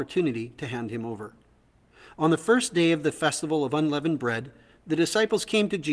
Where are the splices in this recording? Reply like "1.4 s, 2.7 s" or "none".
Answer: none